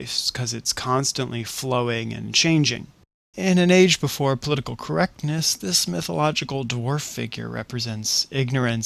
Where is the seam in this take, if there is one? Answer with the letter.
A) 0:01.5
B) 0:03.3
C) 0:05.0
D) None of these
B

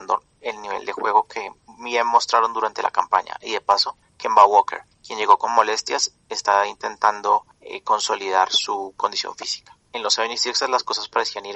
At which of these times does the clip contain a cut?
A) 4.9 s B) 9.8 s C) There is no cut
B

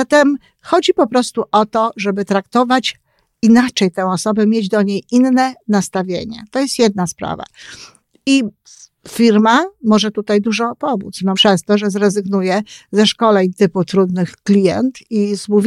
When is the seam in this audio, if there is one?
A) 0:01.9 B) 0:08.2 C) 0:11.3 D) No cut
C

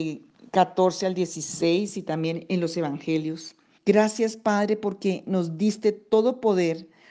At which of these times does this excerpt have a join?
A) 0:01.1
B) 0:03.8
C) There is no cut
B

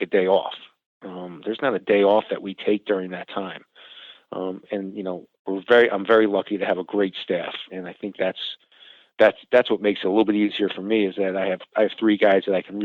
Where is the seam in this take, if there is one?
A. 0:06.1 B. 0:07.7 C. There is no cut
B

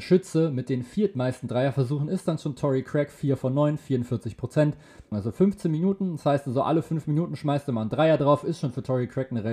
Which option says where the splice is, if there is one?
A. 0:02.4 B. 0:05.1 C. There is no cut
B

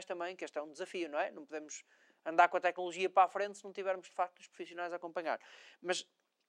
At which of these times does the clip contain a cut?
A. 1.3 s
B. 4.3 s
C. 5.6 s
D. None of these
D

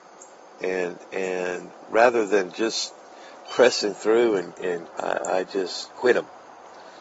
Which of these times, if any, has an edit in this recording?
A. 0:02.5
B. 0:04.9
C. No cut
B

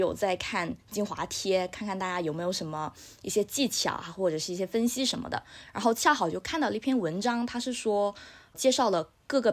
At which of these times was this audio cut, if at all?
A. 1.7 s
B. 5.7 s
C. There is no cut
C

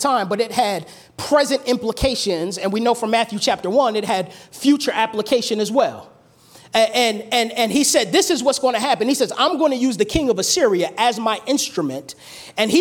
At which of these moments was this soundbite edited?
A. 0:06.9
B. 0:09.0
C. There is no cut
C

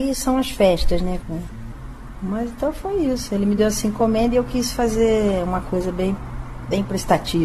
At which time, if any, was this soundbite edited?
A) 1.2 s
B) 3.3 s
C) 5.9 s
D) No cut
A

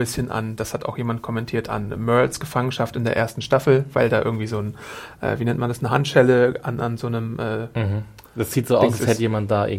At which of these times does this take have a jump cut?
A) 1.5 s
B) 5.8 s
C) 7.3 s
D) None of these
D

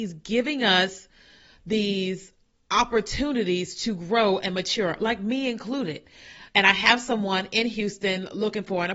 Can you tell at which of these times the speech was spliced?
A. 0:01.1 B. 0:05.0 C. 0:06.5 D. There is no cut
C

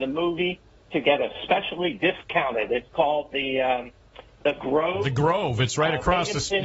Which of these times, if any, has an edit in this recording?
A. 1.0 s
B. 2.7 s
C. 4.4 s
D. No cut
C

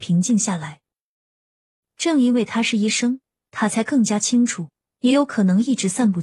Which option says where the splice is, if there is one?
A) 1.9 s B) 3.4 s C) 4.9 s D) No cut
C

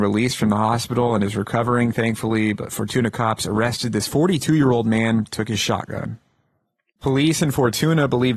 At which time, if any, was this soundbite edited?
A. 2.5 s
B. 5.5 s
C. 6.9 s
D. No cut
C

